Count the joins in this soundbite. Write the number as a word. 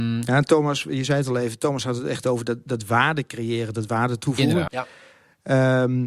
one